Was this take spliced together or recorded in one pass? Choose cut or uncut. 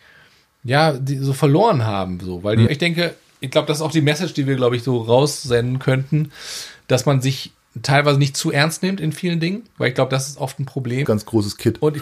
cut